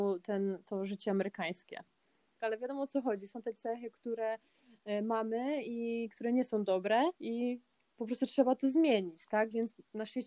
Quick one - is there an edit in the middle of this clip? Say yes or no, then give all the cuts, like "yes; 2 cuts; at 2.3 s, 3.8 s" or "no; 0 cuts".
yes; 2 cuts; at 2.4 s, 7.1 s